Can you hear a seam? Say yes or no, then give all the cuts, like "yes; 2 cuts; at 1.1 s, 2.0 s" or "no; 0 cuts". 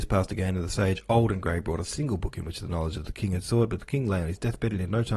no; 0 cuts